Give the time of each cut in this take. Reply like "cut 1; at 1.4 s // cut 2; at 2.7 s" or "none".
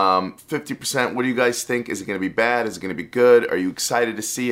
none